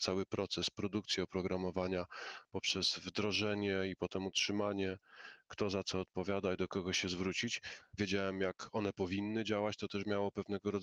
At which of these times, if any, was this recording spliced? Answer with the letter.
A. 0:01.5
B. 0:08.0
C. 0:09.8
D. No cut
B